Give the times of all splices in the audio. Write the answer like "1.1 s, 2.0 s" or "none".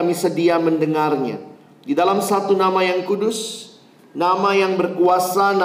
none